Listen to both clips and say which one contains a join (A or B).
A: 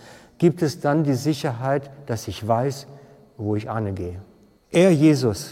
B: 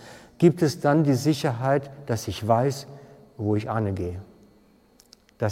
A